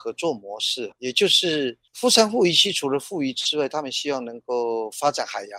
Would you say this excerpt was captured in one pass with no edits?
no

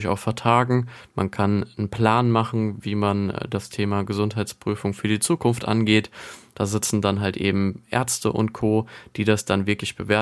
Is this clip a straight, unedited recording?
no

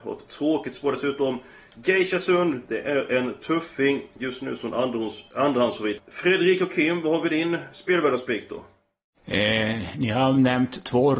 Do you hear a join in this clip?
yes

